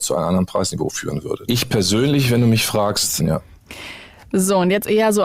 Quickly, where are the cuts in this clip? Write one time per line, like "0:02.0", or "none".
0:01.5
0:03.2